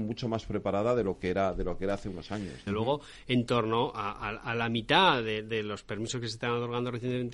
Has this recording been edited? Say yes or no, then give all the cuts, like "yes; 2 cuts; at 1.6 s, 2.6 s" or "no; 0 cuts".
yes; 1 cut; at 2.7 s